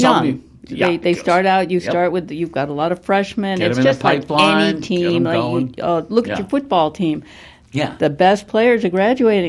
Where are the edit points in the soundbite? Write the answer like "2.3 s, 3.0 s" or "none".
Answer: none